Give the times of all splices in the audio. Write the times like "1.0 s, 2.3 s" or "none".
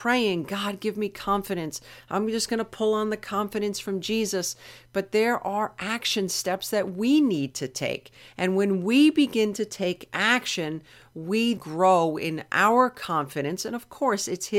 11.6 s